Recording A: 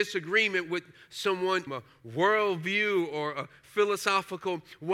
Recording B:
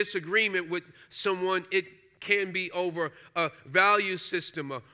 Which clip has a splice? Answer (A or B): A